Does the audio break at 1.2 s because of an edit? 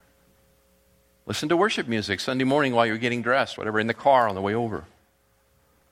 no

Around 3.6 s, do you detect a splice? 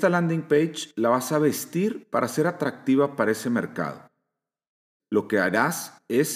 no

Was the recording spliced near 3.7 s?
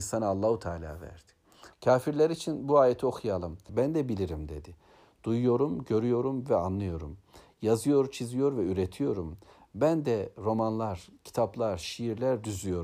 yes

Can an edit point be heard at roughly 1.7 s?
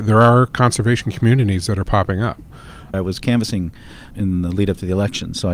no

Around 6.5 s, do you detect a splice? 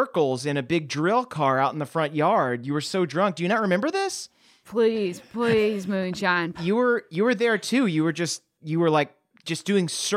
yes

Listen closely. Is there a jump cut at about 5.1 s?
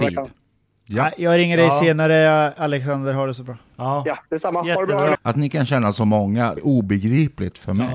yes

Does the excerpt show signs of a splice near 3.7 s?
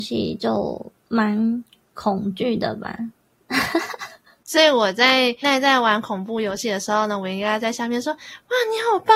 no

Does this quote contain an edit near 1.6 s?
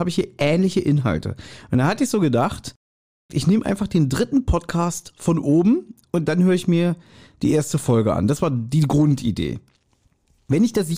no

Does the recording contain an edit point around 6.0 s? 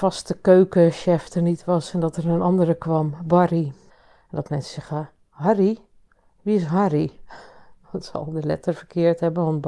no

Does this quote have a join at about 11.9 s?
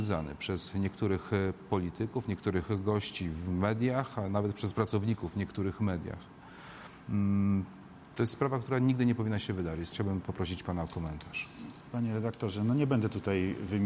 no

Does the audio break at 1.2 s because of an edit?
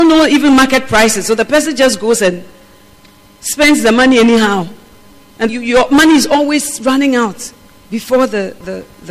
no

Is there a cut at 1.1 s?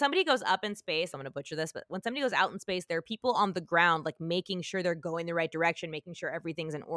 yes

